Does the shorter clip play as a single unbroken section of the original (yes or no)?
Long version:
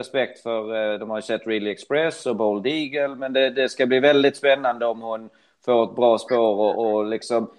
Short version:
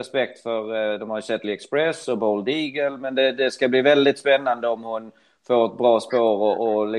no